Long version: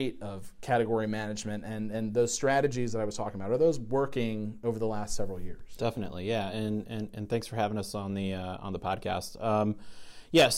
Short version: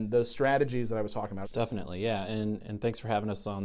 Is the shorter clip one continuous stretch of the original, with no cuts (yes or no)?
no